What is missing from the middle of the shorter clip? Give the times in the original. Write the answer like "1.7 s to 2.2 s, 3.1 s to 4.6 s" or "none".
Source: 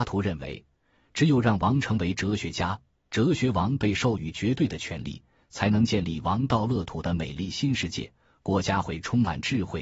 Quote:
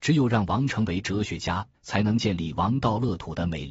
2.9 s to 5.4 s